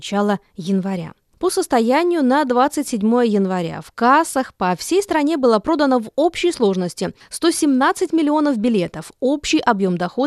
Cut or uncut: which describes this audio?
uncut